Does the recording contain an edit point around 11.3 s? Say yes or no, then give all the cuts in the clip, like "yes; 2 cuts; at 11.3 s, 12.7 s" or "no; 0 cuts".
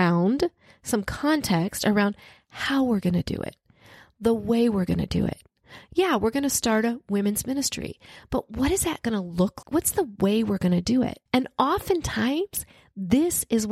yes; 2 cuts; at 9.6 s, 11.3 s